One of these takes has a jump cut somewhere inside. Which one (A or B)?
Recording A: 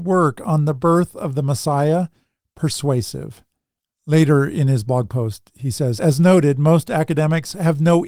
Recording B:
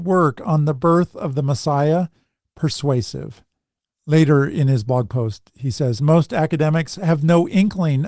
B